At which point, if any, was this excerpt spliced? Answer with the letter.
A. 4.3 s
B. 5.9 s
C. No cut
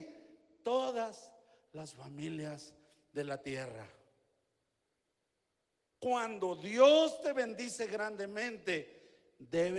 B